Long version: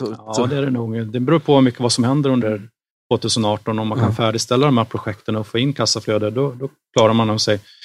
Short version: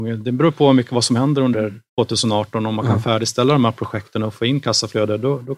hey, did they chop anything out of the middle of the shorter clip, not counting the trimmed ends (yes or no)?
yes